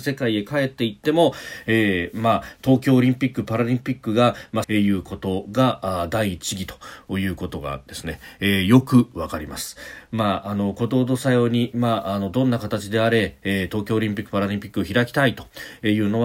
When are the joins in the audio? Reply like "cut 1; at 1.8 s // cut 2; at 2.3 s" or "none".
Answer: cut 1; at 4.6 s